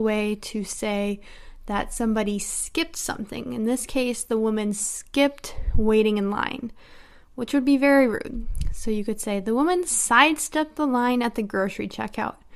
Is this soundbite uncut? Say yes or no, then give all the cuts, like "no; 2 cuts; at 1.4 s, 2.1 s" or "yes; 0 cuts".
yes; 0 cuts